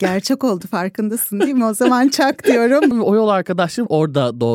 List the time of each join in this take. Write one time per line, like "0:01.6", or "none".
0:02.9